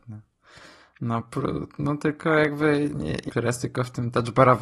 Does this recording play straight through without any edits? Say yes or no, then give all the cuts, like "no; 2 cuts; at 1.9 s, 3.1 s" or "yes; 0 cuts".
no; 1 cut; at 3.3 s